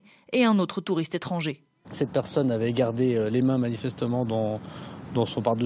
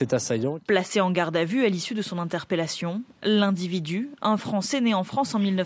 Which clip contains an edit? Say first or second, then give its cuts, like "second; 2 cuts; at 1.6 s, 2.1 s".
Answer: first; 1 cut; at 1.8 s